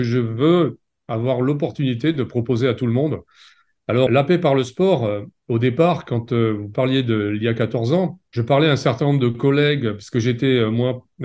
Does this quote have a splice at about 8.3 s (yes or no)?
no